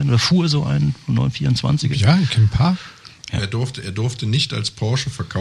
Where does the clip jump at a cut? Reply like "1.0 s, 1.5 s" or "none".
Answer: 3.3 s